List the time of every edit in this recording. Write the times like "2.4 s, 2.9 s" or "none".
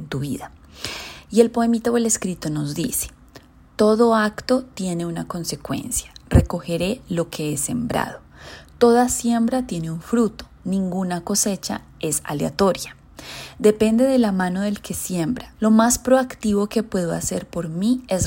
10.6 s, 15.6 s